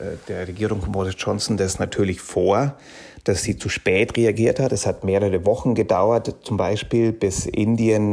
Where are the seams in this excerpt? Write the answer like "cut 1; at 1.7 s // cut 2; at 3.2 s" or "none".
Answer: none